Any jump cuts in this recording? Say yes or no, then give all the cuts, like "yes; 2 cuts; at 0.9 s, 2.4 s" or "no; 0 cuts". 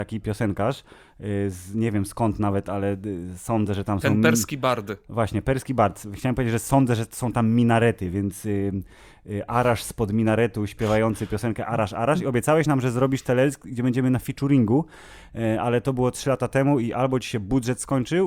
no; 0 cuts